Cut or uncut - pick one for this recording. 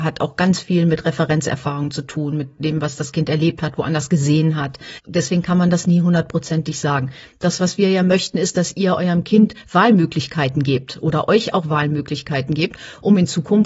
uncut